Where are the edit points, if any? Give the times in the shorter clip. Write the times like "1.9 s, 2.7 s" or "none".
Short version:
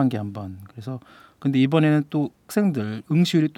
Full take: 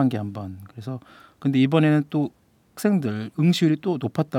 2.4 s